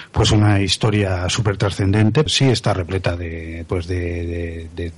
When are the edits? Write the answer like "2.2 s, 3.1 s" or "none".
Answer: 2.3 s